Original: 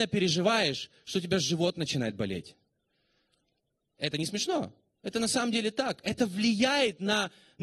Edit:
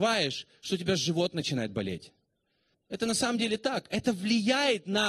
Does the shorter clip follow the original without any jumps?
no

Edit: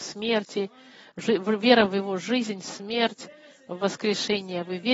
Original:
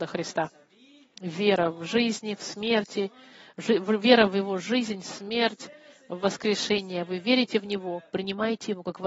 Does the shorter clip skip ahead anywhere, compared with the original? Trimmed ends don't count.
no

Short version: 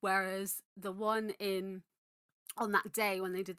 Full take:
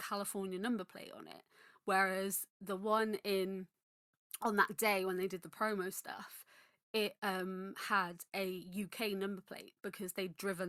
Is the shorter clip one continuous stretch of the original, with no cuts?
yes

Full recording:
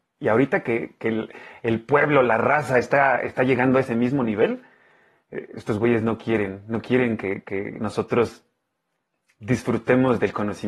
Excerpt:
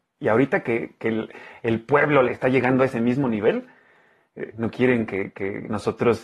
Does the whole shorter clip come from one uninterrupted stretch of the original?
no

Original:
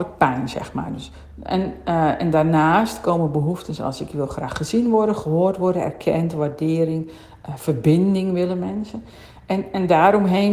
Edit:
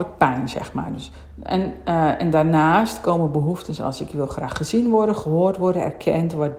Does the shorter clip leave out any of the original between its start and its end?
no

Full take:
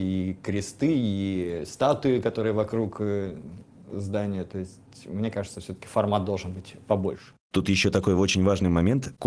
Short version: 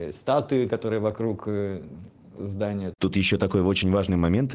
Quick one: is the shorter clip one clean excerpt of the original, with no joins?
no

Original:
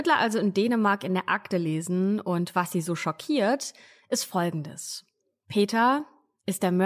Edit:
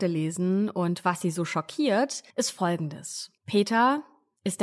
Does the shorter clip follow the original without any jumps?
no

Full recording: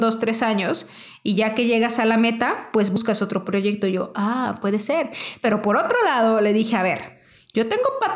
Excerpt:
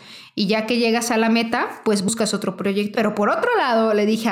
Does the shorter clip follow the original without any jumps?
no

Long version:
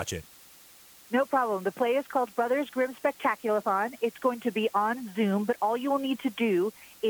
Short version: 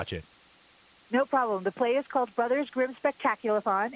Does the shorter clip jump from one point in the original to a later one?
no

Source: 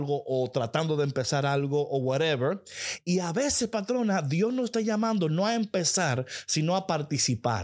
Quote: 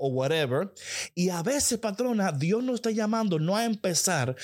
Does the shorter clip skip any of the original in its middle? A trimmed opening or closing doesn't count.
no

